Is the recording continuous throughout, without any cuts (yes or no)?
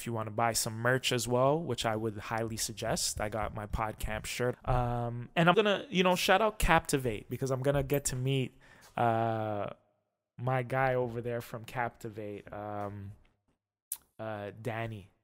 no